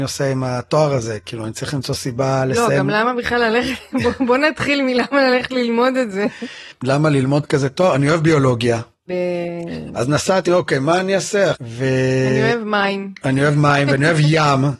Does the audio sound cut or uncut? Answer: cut